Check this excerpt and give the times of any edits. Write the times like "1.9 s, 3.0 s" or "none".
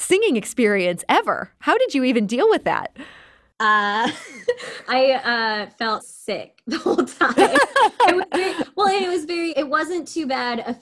6.0 s, 9.5 s